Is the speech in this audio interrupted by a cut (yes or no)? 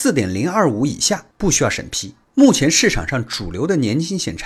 yes